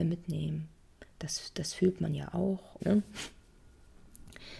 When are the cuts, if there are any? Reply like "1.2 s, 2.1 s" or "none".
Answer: 2.8 s